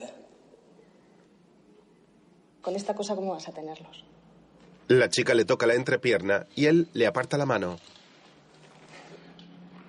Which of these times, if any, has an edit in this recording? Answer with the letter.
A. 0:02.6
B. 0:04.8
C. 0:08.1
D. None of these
A